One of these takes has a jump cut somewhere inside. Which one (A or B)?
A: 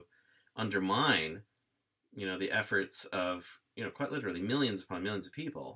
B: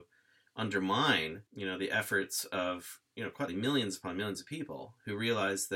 B